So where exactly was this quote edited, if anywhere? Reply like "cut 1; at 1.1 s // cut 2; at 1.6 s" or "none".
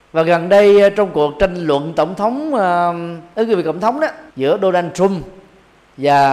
cut 1; at 4.3 s